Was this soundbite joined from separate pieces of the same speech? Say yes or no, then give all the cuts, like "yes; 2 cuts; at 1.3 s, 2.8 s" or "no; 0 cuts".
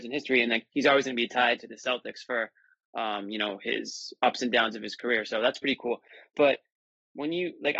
no; 0 cuts